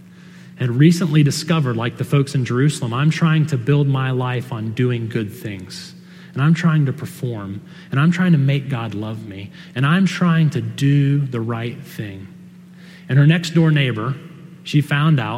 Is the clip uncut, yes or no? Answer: yes